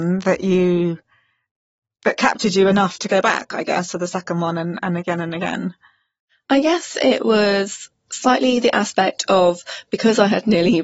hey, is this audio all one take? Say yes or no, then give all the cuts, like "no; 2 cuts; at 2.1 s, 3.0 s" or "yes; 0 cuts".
yes; 0 cuts